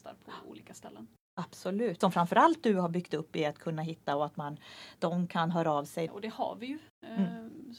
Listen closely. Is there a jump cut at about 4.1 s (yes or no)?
no